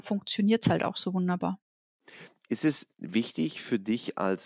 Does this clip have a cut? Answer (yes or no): no